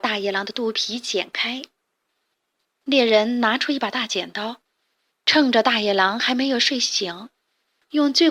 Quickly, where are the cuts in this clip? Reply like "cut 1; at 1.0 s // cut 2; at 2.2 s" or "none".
cut 1; at 2.1 s

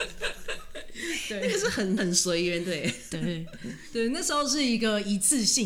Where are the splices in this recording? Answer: cut 1; at 2.0 s

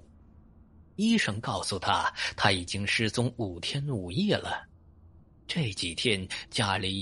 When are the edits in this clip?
cut 1; at 5.4 s

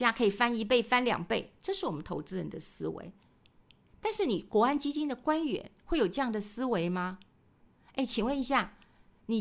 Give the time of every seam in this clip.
none

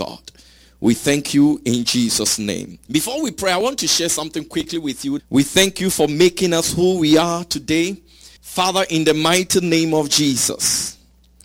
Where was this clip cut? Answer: cut 1; at 2.9 s // cut 2; at 5.2 s // cut 3; at 8.4 s

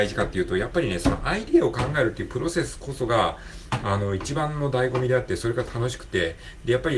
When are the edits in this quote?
none

